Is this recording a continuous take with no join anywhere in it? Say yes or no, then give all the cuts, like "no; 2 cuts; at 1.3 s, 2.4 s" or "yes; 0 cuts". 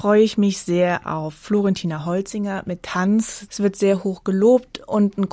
no; 1 cut; at 3.5 s